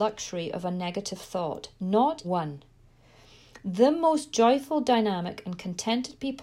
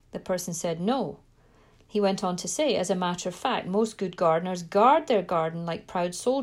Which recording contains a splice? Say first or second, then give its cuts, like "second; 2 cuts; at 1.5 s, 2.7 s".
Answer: first; 1 cut; at 2.2 s